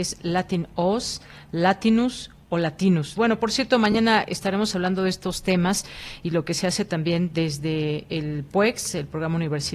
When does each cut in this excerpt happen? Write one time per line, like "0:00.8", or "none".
0:03.1